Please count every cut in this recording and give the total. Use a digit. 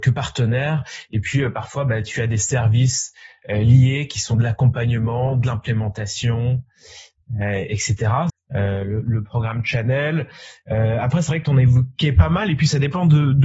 1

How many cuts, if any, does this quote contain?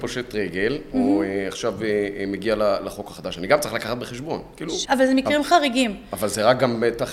1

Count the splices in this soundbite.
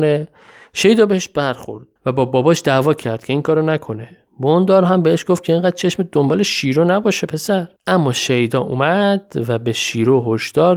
3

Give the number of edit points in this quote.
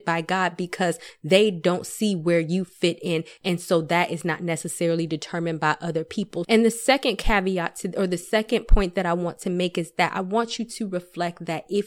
2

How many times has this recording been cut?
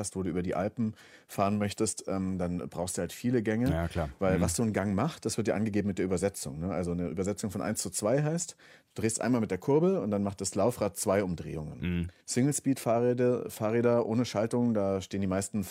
1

